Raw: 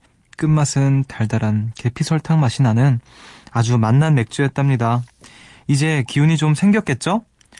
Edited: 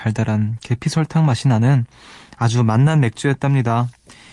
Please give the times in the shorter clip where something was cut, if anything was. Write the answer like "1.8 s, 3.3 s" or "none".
none